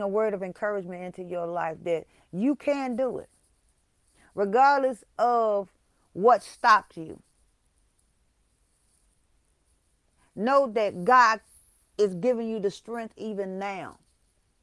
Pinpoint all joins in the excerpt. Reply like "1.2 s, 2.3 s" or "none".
none